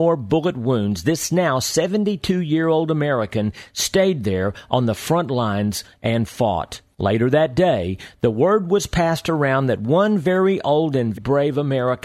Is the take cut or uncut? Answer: cut